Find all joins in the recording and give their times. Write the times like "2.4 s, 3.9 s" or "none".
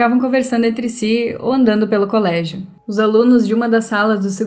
2.8 s

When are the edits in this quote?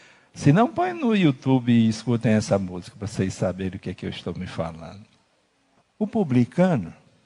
5.8 s

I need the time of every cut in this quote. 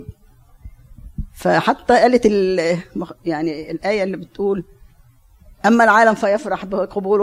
none

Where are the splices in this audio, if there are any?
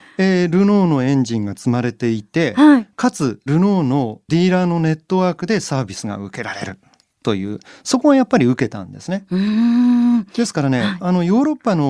3.5 s

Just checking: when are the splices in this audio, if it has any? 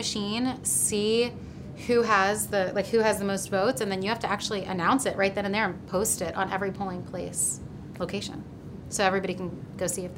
none

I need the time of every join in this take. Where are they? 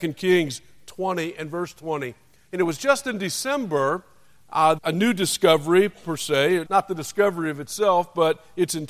4.8 s, 6.7 s

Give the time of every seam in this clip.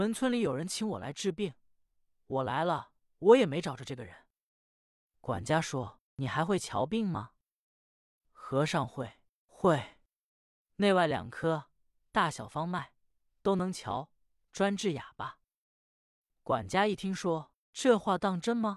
none

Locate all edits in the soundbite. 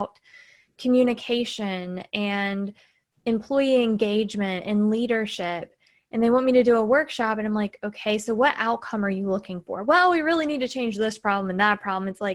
none

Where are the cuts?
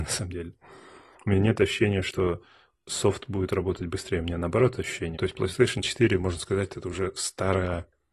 5.2 s

